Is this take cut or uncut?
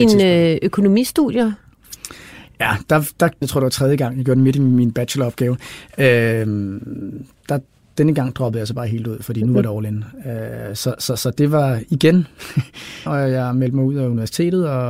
cut